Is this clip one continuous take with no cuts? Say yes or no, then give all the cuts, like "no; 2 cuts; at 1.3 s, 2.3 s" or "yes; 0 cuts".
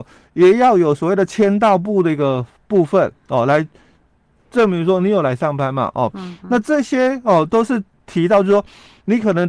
yes; 0 cuts